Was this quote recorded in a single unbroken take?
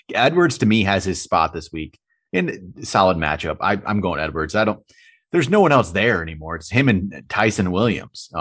yes; 0 cuts

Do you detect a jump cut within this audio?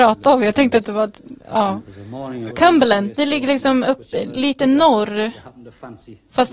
yes; 1 cut; at 2.5 s

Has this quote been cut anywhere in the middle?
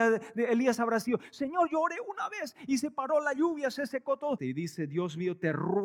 yes; 1 cut; at 4.4 s

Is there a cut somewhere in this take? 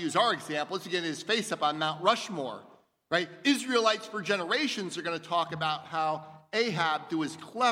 no; 0 cuts

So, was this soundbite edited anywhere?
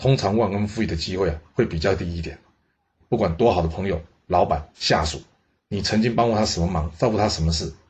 yes; 1 cut; at 2.9 s

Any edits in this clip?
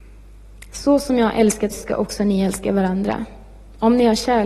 yes; 1 cut; at 1.7 s

